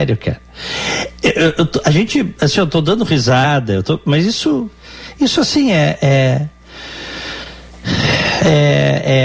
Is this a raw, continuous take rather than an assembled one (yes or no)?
yes